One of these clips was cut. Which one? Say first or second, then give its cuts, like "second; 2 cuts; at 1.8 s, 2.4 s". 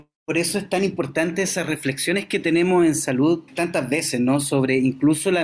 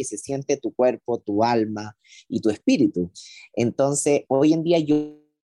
first; 1 cut; at 3.5 s